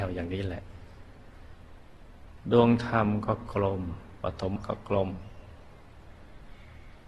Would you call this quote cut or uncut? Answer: cut